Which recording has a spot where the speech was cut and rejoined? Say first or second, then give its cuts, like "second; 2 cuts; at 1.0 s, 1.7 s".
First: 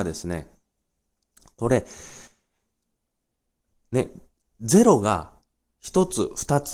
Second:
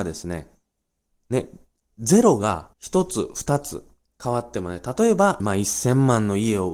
second; 3 cuts; at 1.1 s, 2.7 s, 5.4 s